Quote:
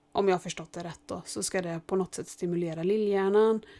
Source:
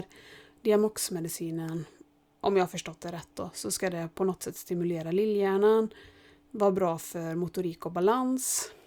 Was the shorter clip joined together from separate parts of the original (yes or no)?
no